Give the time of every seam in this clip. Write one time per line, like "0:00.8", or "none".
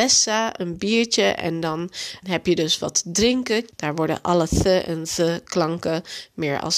0:02.2
0:03.7